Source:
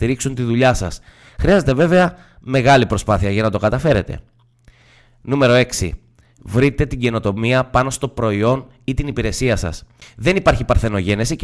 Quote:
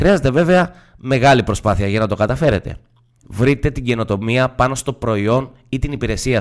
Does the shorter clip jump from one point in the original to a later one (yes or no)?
yes